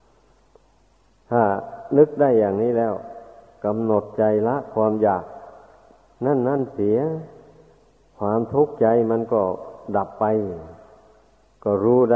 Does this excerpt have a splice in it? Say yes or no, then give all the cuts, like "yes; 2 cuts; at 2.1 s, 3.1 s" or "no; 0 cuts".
no; 0 cuts